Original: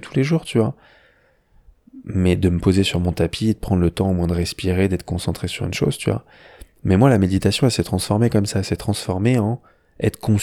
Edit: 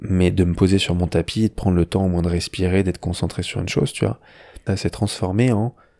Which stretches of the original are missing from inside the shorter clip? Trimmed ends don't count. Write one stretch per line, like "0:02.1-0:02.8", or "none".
0:06.7-0:08.5